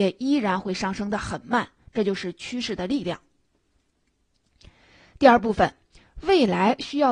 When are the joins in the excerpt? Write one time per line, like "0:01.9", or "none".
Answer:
none